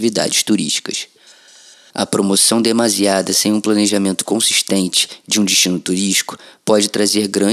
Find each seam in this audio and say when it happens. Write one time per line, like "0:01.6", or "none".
0:01.9

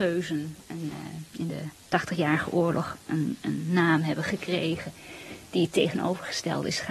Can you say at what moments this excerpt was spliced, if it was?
none

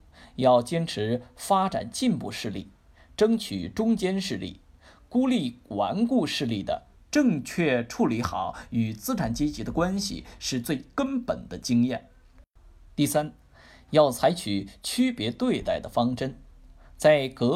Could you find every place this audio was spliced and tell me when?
0:07.0

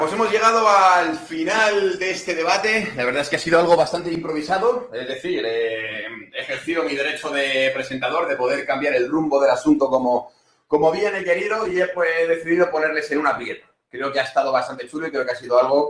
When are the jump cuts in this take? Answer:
none

